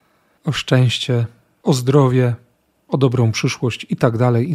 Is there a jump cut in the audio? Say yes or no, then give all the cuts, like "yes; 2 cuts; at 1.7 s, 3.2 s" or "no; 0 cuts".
no; 0 cuts